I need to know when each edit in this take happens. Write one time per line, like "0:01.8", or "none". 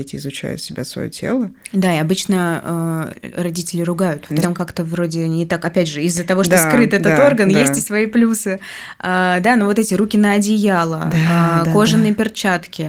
0:04.4